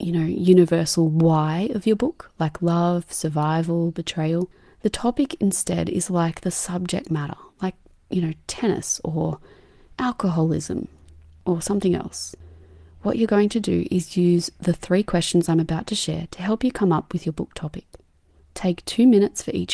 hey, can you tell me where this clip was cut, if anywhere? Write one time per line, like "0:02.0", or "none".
none